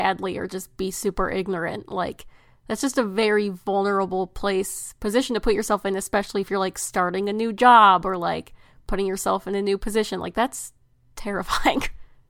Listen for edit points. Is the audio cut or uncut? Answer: uncut